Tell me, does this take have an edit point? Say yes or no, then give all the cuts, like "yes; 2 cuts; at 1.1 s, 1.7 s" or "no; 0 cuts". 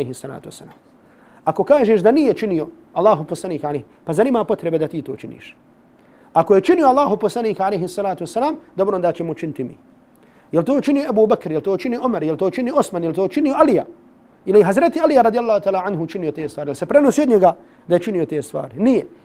no; 0 cuts